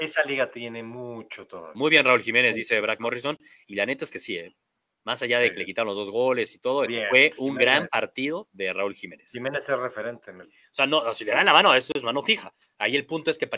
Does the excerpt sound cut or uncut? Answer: cut